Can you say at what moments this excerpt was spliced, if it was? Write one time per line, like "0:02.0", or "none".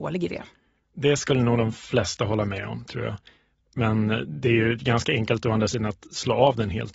none

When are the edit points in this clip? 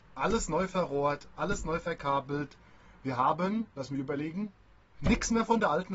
0:03.7

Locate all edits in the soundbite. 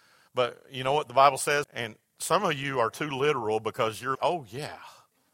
0:01.6
0:04.1

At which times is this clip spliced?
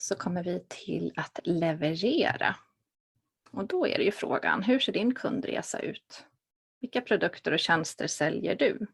none

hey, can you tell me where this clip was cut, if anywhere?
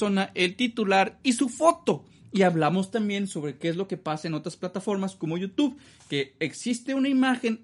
none

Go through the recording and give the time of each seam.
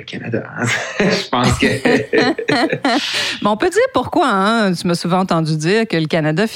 none

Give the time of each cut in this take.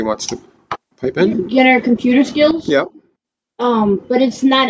0:01.3

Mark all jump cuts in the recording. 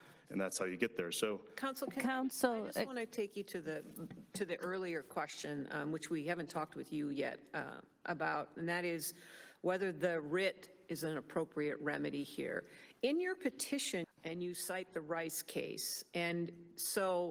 0:14.0

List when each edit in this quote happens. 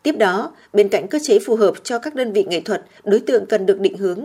0:03.0

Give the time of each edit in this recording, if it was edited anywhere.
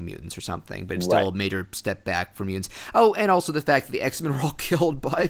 none

